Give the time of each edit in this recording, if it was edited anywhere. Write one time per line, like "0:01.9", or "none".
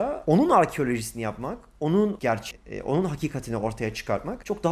none

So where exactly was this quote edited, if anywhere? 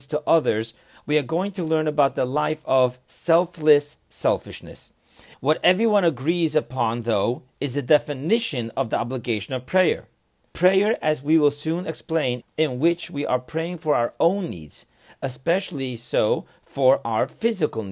0:05.3
0:10.5
0:12.4

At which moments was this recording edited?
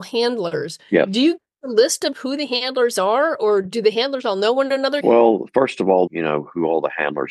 0:05.0
0:06.1

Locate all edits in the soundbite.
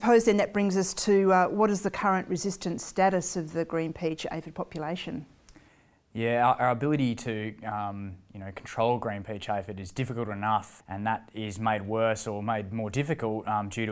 0:10.8

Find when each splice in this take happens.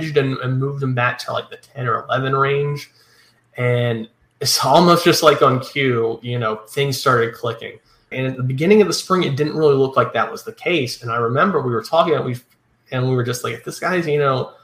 0:08.1

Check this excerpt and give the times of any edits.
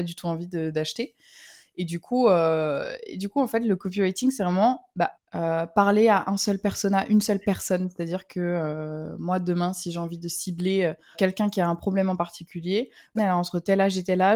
0:05.1
0:11.1
0:13.2

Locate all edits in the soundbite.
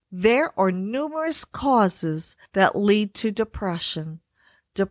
none

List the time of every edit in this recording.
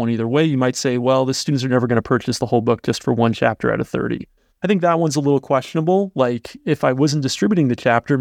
0:04.5

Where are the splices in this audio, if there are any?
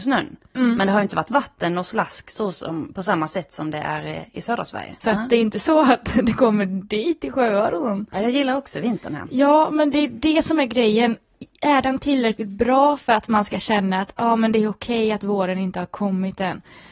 0:05.0
0:08.1

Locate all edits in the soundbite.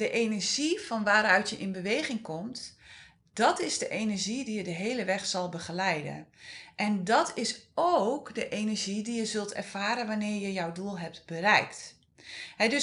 none

